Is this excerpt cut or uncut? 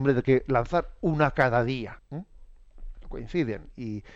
cut